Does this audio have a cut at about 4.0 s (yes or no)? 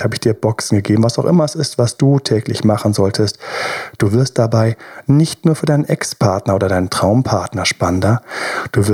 yes